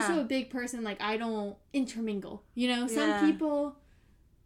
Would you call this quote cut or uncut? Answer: cut